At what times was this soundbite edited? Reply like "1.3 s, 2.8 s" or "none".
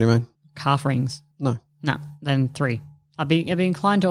1.3 s